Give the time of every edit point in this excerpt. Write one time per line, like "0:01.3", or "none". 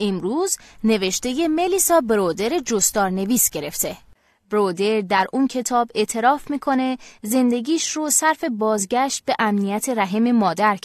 none

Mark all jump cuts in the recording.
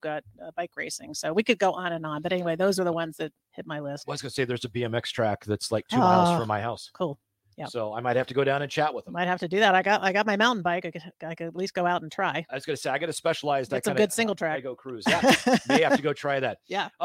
none

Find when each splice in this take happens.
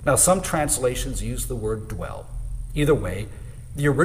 none

